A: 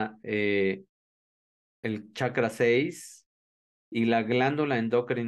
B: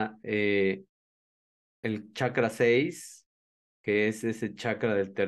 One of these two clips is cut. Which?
A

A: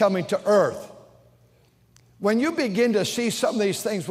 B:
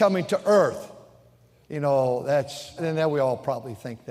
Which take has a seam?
B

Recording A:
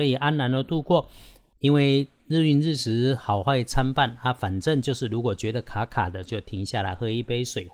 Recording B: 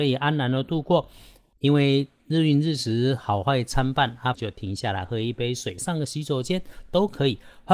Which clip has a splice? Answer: B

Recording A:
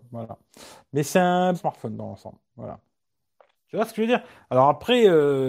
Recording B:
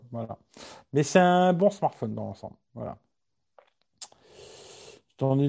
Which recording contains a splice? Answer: A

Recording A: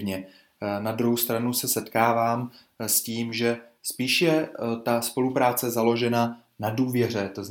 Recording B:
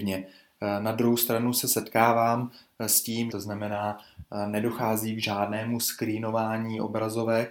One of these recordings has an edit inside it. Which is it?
B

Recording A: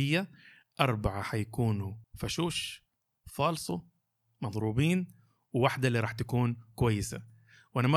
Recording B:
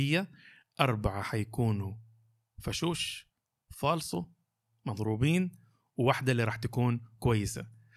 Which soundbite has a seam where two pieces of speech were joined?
A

